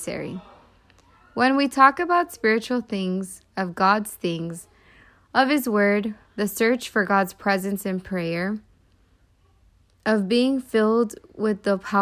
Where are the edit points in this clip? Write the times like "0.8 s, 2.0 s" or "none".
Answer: none